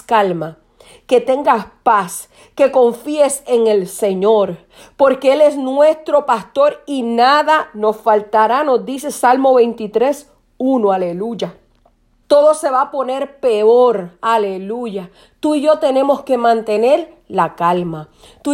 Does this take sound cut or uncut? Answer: cut